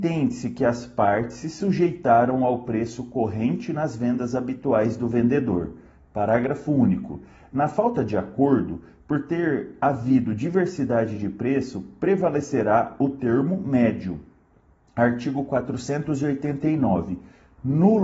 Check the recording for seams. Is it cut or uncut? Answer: uncut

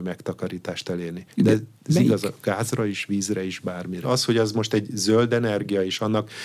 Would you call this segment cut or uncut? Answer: cut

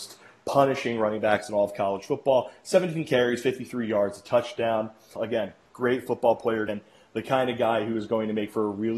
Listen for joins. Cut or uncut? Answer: cut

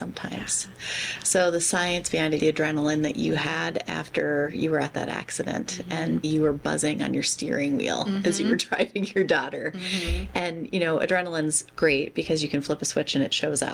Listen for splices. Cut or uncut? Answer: cut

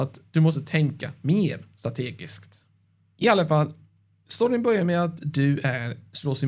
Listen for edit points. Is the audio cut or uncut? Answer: uncut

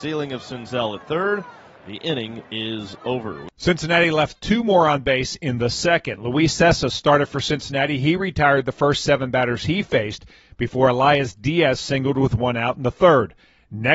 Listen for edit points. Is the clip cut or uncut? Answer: uncut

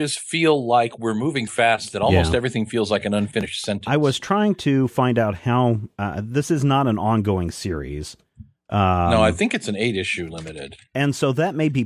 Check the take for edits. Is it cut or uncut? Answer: cut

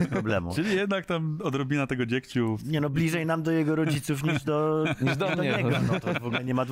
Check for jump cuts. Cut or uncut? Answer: uncut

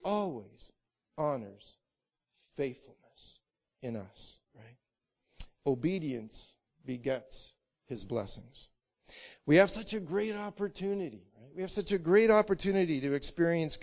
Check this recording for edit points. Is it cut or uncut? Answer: uncut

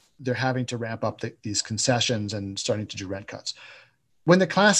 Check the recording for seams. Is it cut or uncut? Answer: uncut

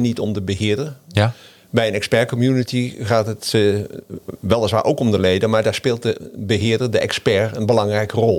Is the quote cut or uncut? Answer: uncut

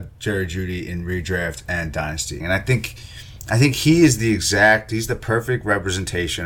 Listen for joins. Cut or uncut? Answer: cut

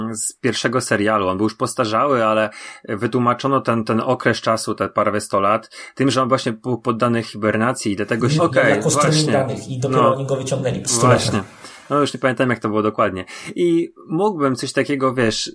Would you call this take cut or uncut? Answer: cut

